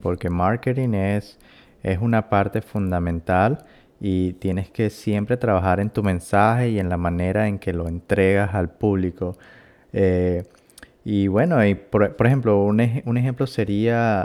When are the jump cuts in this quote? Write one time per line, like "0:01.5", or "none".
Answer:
none